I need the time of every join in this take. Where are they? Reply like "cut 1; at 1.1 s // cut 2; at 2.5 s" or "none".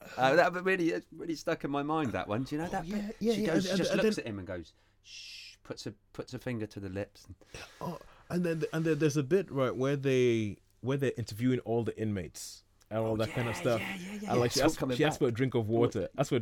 none